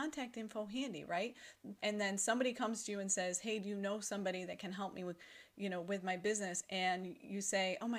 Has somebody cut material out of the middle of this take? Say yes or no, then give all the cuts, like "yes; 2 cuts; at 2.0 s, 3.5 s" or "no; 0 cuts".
yes; 1 cut; at 1.8 s